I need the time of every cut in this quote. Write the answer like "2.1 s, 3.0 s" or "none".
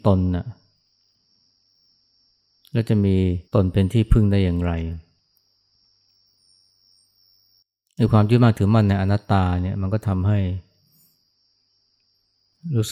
3.4 s, 9.2 s

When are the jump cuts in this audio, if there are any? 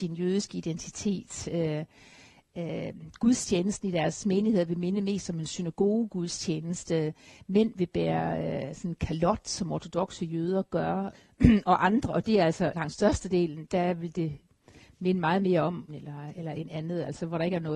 11.1 s, 12.7 s, 15.9 s

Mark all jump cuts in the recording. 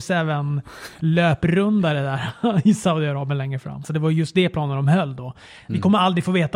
3.8 s

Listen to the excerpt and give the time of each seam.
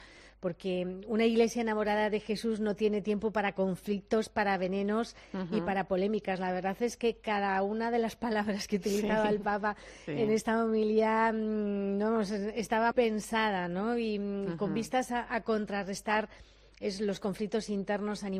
12.9 s

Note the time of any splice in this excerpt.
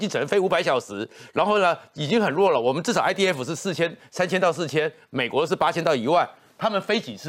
none

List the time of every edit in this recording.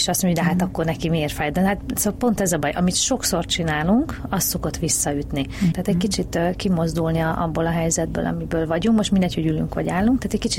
5.7 s

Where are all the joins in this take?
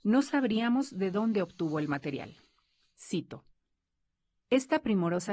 none

